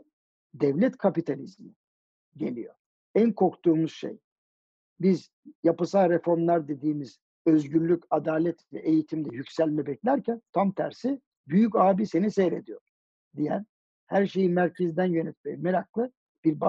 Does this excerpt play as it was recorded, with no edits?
no; 1 cut; at 2.9 s

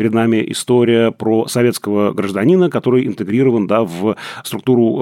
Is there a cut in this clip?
no; 0 cuts

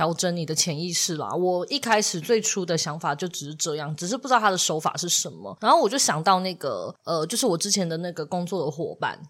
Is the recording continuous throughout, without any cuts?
yes; 0 cuts

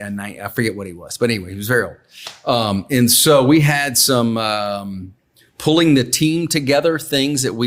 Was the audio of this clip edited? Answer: no; 0 cuts

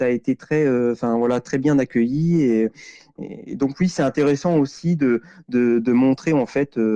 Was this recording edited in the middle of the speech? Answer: no; 0 cuts

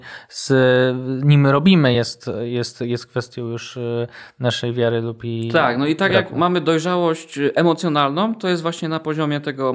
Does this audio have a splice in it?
no; 0 cuts

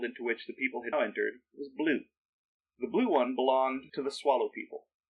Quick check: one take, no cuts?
no; 2 cuts; at 0.9 s, 2.7 s

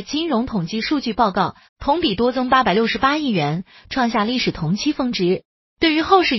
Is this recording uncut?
no; 1 cut; at 1.7 s

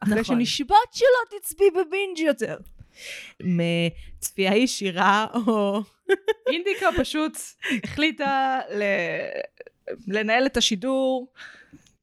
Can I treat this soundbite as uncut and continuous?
no; 1 cut; at 3.4 s

